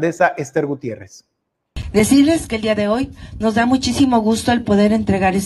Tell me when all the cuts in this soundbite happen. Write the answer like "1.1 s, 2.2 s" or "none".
none